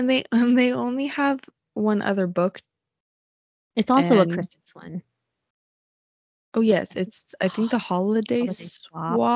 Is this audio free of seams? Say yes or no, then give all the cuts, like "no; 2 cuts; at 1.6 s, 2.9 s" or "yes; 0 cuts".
yes; 0 cuts